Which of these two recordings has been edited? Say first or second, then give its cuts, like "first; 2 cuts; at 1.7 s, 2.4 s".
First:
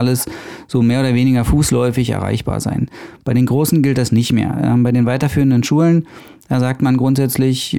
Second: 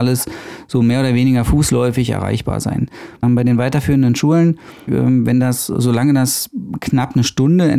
second; 2 cuts; at 3.2 s, 4.9 s